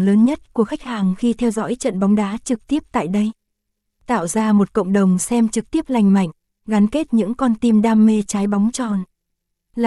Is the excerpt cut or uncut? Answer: uncut